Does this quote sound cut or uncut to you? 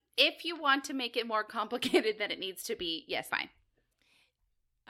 cut